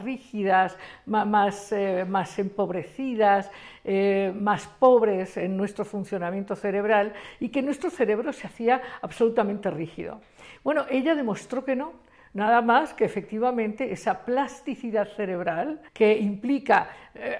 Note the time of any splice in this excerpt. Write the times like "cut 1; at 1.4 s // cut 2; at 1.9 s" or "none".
cut 1; at 15.9 s